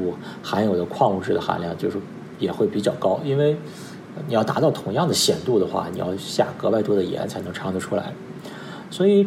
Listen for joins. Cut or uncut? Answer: uncut